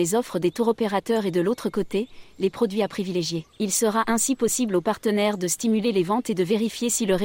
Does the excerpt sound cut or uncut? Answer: cut